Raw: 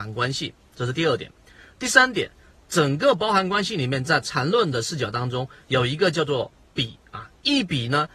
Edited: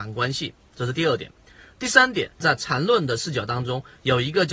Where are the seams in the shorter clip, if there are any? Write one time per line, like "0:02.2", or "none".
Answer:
0:02.4